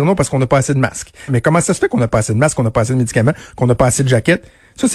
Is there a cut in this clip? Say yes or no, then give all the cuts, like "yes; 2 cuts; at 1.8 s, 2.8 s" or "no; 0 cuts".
yes; 1 cut; at 1.3 s